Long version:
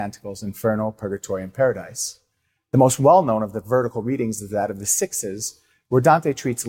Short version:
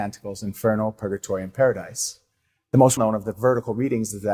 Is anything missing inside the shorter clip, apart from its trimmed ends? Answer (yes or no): yes